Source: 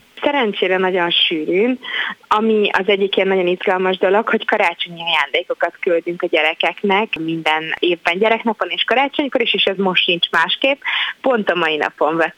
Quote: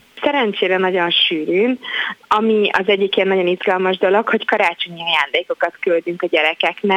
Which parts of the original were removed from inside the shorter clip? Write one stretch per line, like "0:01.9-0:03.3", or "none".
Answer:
none